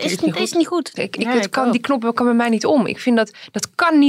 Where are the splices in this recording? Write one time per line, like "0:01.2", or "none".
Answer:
0:01.0